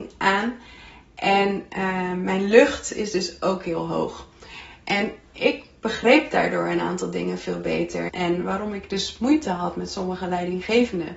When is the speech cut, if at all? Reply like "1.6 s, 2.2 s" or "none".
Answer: 8.1 s